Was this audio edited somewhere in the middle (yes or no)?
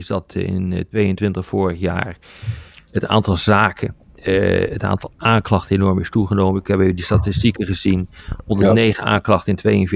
no